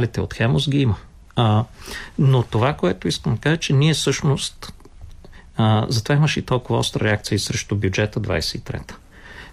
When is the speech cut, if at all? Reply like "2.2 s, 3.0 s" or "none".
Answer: 1.3 s